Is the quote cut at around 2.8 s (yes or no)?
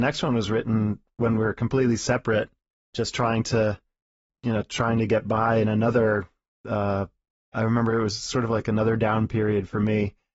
no